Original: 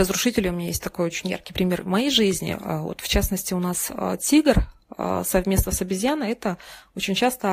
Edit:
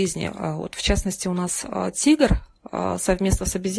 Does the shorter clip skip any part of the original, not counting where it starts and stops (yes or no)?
no